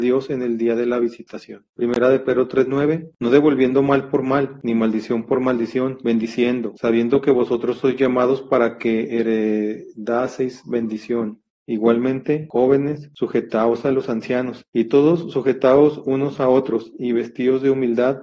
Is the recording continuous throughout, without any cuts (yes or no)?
no